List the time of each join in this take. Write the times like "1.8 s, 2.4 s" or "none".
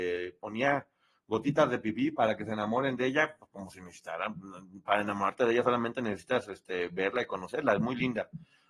none